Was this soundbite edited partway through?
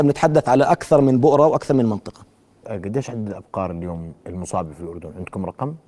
yes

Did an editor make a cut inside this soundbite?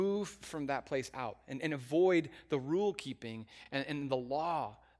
no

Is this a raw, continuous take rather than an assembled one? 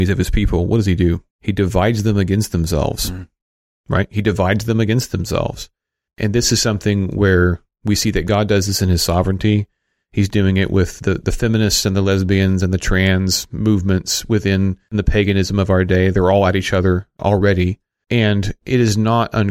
no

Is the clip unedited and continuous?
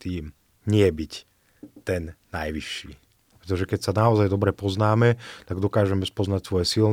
no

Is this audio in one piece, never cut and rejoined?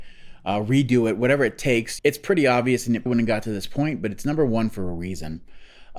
no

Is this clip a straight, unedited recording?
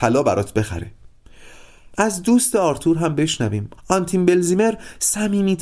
no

